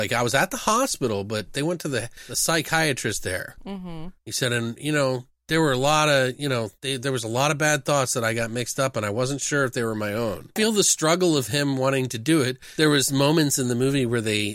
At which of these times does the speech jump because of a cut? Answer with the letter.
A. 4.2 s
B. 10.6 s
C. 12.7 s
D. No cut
B